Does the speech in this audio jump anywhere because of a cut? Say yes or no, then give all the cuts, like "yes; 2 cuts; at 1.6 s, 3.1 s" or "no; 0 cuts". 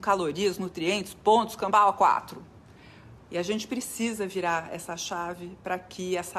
yes; 1 cut; at 3.2 s